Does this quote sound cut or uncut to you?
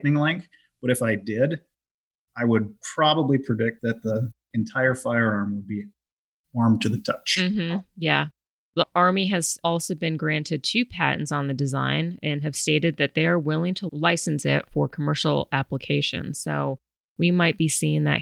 uncut